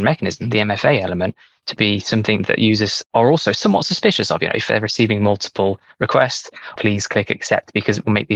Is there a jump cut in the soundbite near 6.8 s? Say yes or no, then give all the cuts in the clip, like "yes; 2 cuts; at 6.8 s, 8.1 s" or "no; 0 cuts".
yes; 1 cut; at 6.8 s